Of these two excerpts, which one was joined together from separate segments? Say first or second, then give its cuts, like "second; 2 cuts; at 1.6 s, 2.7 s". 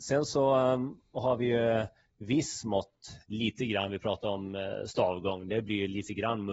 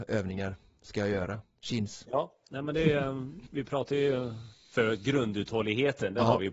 second; 1 cut; at 3.5 s